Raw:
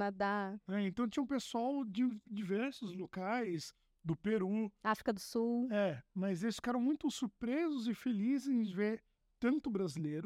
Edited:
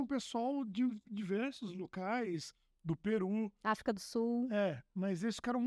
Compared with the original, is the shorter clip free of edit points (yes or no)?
yes